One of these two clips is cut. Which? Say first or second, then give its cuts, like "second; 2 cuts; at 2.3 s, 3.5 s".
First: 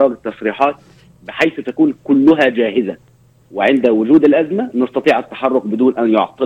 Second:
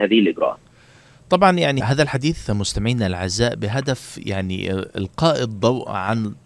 second; 1 cut; at 1.8 s